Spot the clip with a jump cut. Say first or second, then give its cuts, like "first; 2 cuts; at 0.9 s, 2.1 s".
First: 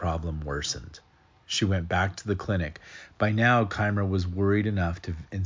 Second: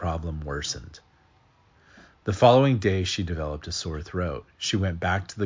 first; 1 cut; at 1.4 s